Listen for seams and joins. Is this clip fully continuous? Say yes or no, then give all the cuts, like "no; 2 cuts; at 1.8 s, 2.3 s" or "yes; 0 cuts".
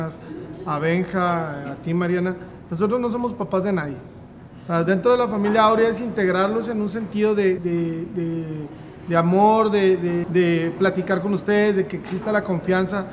no; 2 cuts; at 7.6 s, 10.2 s